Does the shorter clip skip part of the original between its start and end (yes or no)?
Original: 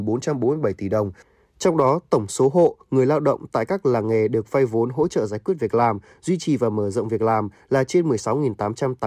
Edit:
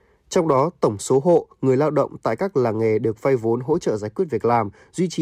no